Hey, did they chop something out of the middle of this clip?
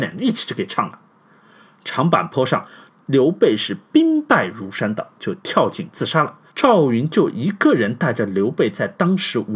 yes; 2 cuts; at 5.2 s, 6.5 s

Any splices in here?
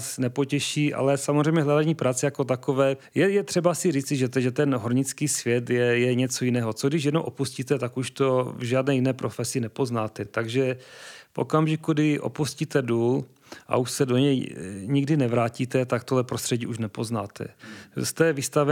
no; 0 cuts

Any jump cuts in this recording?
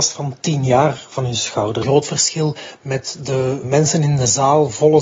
yes; 2 cuts; at 1.8 s, 3.6 s

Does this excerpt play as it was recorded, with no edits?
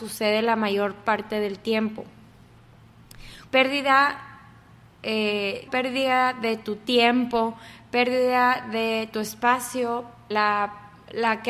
no; 3 cuts; at 3.5 s, 5.7 s, 10.3 s

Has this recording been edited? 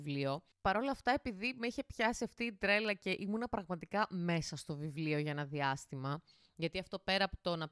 no; 0 cuts

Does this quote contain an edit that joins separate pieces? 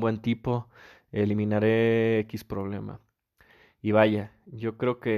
no; 0 cuts

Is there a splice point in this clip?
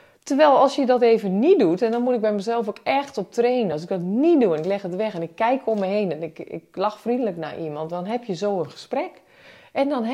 no; 0 cuts

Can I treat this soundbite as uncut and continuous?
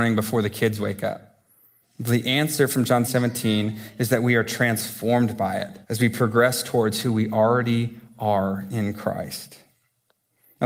no; 3 cuts; at 1.8 s, 3.0 s, 5.8 s

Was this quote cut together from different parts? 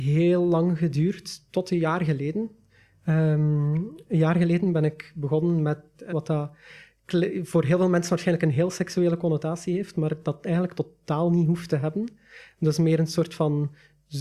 yes; 1 cut; at 6.1 s

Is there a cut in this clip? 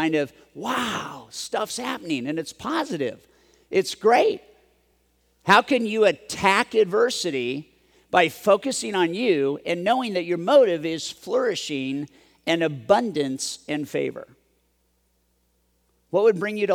no; 0 cuts

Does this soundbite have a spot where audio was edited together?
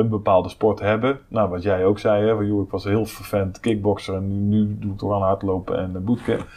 no; 0 cuts

